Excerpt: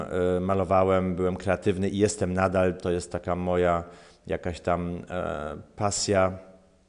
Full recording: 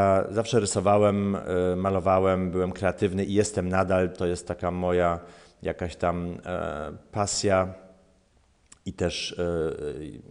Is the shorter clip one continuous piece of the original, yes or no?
yes